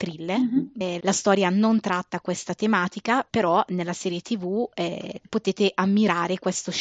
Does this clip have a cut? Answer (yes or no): yes